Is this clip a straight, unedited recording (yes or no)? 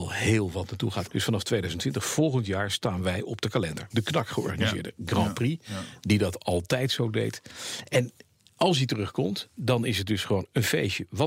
no